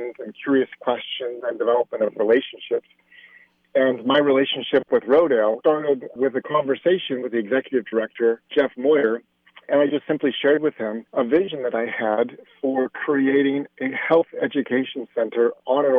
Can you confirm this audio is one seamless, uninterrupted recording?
yes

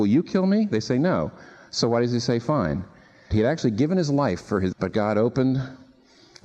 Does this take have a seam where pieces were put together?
yes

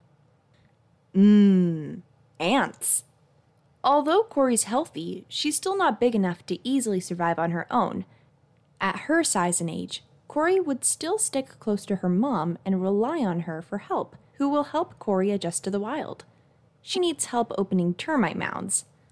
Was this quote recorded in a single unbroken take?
no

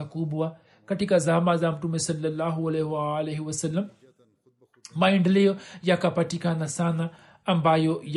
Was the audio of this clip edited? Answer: no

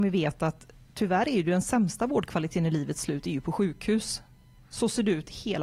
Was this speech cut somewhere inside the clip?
no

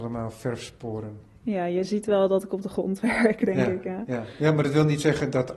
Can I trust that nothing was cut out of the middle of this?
yes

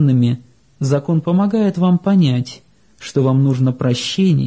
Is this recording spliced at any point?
no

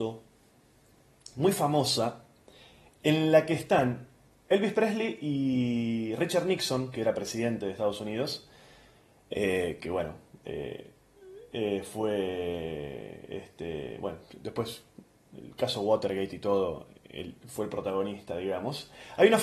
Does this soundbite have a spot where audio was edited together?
no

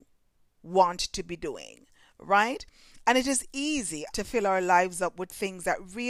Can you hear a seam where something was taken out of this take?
yes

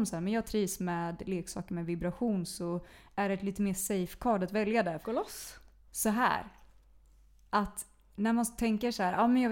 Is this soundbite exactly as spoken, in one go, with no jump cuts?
no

